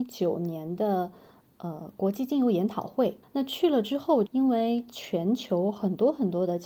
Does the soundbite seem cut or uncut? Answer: cut